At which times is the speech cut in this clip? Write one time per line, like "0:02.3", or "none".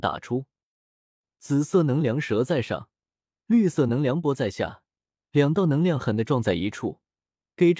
0:06.0